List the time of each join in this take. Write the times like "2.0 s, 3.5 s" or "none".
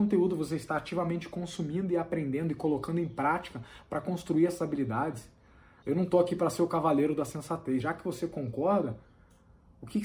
5.8 s, 7.8 s